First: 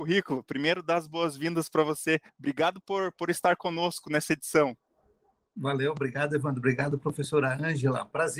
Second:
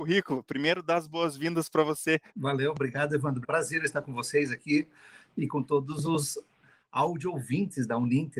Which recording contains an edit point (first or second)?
second